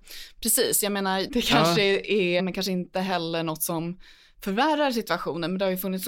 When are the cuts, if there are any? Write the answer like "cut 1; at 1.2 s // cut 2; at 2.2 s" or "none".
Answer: cut 1; at 1.3 s // cut 2; at 2.4 s